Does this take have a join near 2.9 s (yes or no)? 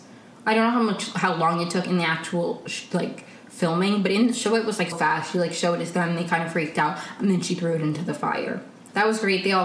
no